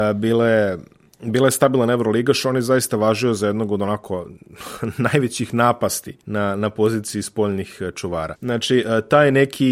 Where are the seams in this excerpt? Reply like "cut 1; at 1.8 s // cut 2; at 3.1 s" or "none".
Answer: cut 1; at 6.2 s // cut 2; at 8.4 s